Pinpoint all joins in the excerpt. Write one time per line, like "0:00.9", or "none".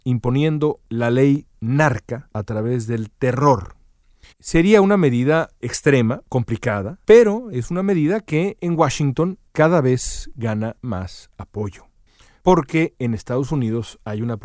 0:04.3